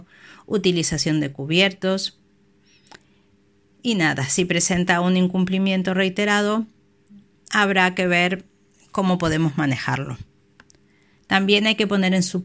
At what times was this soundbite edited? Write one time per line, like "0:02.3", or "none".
none